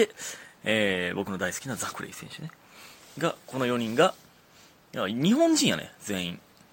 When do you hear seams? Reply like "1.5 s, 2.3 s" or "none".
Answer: none